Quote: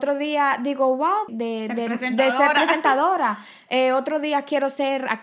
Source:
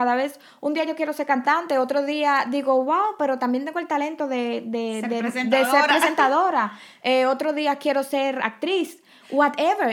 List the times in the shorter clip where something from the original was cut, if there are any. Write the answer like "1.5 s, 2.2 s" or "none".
1.3 s